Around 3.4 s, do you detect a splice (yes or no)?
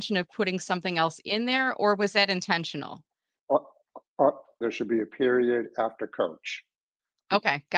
yes